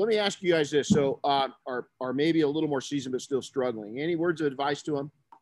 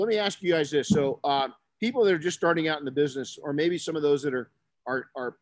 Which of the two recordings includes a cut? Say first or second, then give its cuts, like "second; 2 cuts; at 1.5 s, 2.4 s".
first; 1 cut; at 1.6 s